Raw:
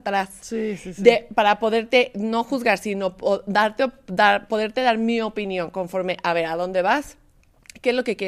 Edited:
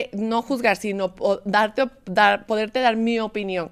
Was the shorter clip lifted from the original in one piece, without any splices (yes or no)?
yes